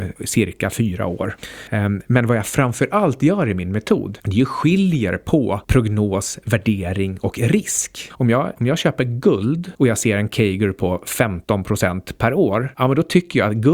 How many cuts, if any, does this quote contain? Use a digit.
1